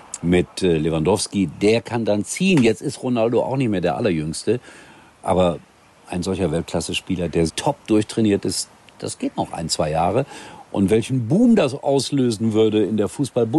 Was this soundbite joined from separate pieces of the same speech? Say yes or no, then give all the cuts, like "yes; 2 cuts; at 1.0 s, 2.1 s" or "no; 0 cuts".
yes; 1 cut; at 7.5 s